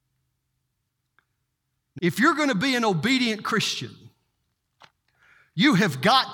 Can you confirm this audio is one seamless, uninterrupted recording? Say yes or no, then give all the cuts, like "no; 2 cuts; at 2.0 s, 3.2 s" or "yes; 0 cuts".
no; 1 cut; at 2.0 s